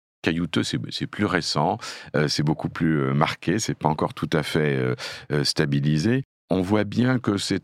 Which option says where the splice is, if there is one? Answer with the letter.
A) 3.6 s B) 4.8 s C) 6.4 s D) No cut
D